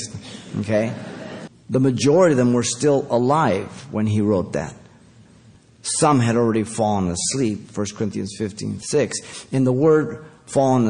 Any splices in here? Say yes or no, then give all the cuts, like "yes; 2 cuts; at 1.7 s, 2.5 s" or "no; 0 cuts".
yes; 1 cut; at 1.5 s